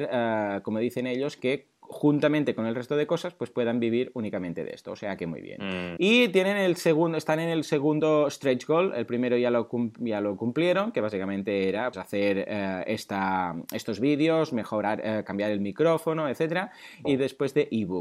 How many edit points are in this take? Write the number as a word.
three